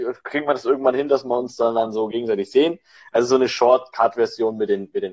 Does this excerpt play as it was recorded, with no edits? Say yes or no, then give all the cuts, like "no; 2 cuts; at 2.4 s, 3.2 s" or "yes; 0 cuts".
no; 1 cut; at 3.0 s